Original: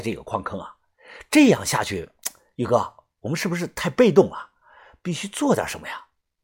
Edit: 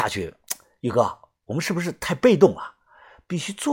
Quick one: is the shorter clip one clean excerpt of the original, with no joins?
yes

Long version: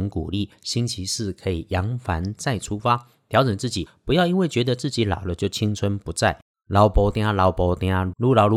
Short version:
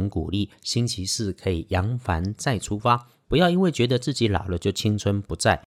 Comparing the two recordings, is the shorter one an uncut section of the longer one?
no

